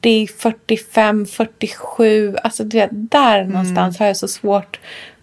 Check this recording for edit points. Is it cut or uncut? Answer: uncut